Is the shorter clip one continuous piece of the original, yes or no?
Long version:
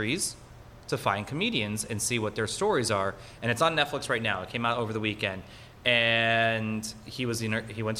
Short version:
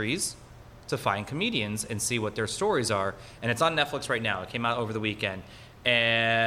yes